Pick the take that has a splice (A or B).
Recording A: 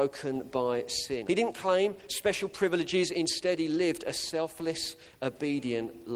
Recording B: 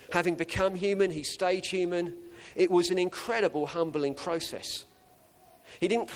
A